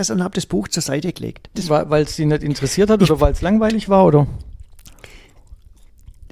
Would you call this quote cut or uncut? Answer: cut